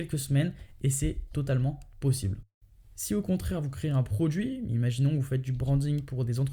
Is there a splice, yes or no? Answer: no